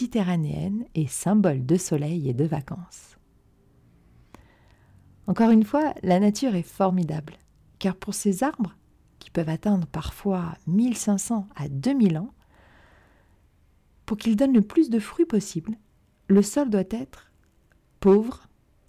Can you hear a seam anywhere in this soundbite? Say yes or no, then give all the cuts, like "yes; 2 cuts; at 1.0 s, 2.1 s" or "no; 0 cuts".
no; 0 cuts